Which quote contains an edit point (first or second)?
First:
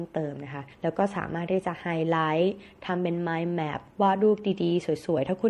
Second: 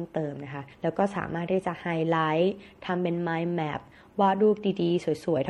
first